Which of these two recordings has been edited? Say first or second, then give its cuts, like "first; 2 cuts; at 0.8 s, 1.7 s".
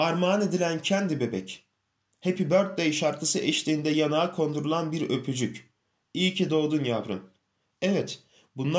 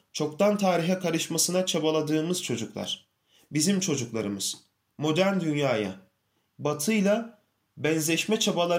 second; 1 cut; at 6.5 s